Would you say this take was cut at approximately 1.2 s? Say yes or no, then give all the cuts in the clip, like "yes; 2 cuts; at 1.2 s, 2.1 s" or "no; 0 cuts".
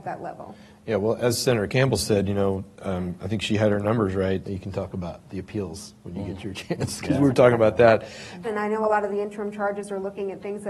no; 2 cuts; at 4.4 s, 8.4 s